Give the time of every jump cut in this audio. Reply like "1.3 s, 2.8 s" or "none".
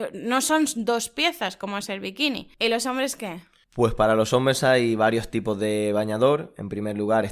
2.6 s